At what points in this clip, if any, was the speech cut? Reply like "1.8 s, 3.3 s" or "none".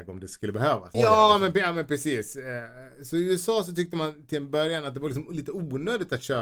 0.9 s